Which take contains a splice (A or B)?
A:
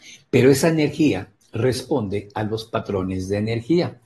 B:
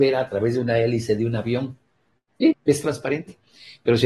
B